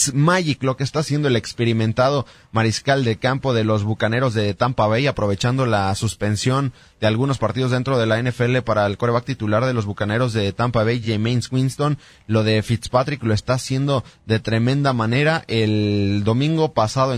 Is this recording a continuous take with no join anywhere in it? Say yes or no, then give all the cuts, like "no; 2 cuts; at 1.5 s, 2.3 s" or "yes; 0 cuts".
yes; 0 cuts